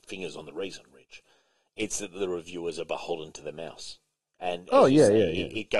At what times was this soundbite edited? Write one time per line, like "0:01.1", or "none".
none

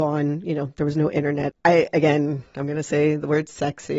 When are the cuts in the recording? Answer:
0:01.5

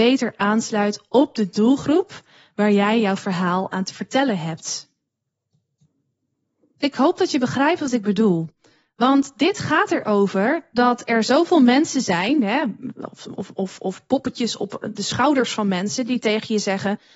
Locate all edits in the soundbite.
none

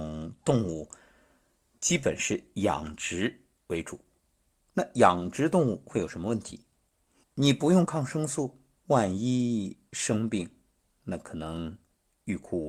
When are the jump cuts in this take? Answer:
0:07.2
0:08.8

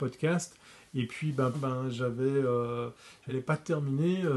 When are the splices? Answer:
0:01.5
0:03.3

